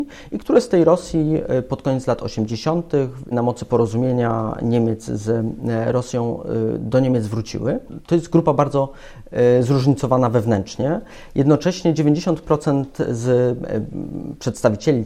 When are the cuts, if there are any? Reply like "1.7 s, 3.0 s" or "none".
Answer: 3.3 s